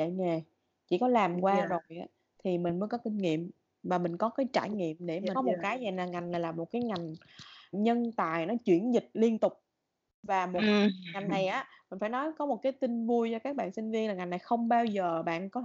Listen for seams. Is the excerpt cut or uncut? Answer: cut